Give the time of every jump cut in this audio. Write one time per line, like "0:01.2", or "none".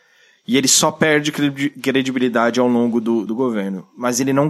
0:03.3